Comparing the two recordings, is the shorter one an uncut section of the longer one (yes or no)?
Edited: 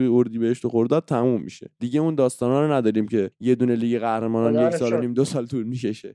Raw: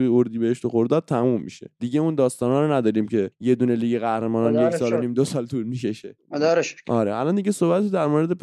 yes